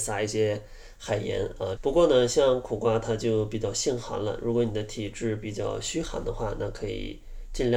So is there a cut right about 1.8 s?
yes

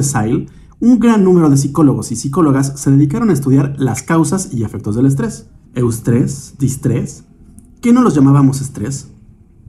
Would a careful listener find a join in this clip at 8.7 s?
no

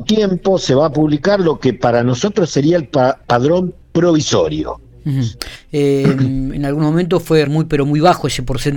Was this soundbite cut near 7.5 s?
yes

